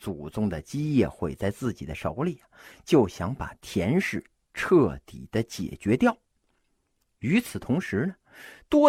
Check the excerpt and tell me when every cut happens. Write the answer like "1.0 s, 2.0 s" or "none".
none